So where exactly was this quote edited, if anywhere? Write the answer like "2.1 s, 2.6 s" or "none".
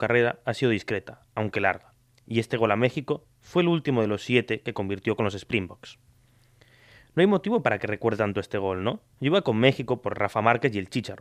9.1 s